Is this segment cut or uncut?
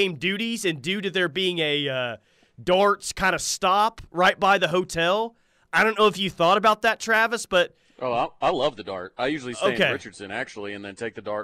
uncut